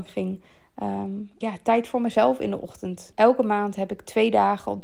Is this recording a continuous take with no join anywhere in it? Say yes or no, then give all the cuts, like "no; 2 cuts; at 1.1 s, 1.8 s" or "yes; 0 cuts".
no; 2 cuts; at 1.4 s, 3.1 s